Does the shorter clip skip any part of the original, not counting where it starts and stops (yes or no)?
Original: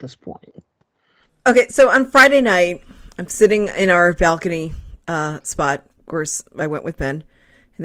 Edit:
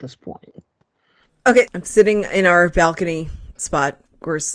yes